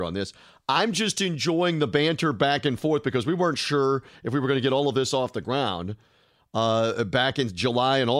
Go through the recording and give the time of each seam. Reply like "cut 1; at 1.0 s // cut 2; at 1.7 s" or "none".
none